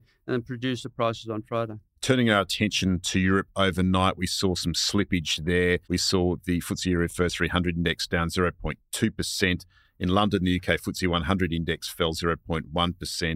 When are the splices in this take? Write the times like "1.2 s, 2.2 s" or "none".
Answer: 5.8 s